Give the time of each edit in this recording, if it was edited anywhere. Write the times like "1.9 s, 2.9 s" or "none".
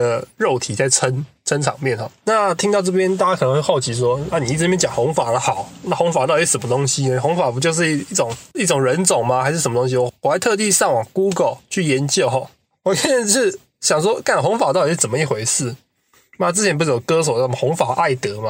none